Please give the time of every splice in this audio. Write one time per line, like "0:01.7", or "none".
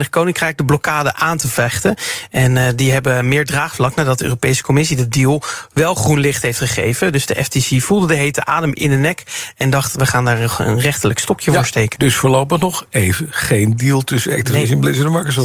0:12.0